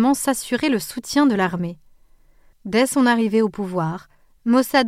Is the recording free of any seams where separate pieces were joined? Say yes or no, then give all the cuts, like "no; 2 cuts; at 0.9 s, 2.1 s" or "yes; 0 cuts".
no; 1 cut; at 2.5 s